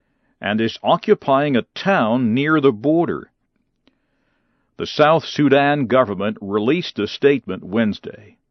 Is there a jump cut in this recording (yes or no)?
no